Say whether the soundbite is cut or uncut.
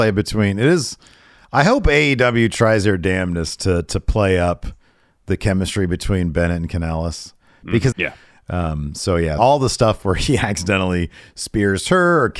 cut